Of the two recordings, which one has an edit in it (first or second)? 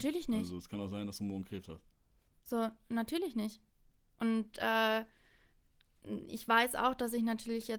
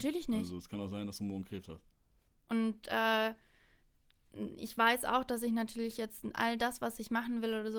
second